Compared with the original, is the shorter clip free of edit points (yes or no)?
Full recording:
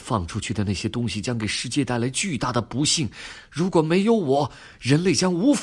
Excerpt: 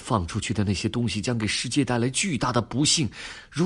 yes